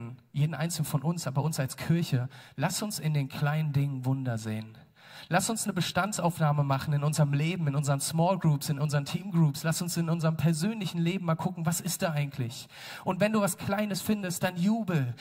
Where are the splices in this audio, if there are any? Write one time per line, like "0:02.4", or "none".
none